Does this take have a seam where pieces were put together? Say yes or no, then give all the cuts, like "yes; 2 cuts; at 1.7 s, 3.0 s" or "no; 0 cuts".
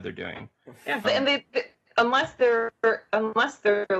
yes; 1 cut; at 1.0 s